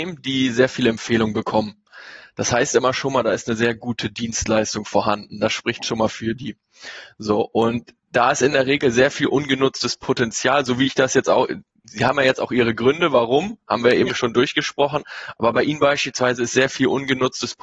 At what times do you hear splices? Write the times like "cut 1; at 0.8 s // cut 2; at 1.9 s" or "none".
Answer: none